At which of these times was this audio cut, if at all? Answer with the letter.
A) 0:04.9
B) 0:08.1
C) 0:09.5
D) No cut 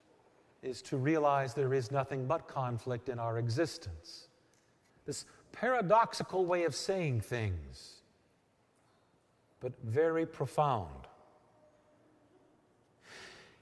A